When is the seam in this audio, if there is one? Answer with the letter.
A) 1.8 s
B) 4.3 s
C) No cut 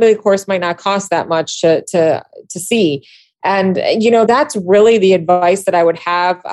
B